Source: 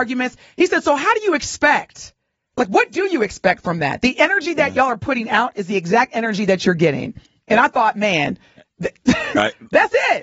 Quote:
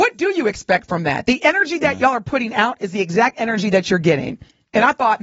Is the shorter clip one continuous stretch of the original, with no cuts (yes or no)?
yes